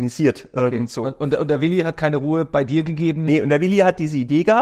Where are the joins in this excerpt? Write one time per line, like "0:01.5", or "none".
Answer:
none